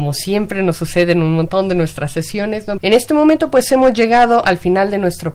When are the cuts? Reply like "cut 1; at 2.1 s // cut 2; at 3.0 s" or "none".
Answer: cut 1; at 2.8 s